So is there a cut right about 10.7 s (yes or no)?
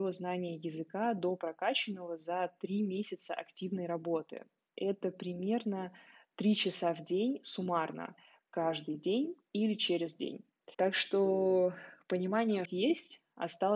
yes